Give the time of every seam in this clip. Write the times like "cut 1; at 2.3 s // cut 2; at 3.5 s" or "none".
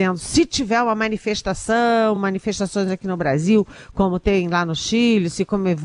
none